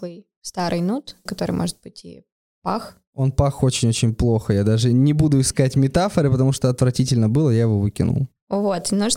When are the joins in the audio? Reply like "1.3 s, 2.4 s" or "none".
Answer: 1.3 s